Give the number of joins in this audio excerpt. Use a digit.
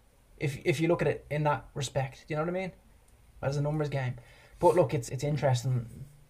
2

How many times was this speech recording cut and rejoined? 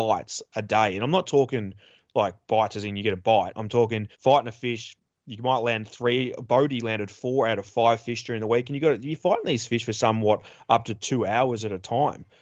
1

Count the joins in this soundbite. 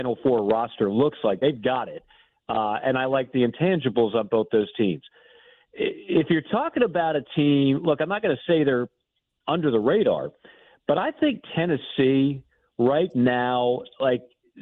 0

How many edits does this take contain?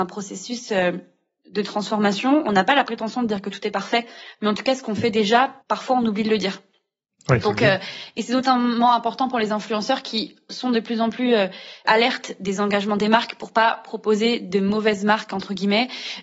1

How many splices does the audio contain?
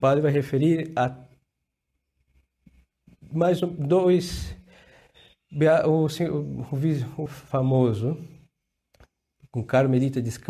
1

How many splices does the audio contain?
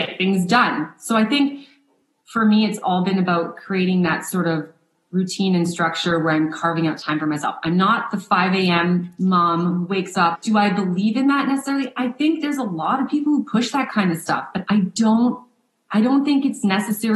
0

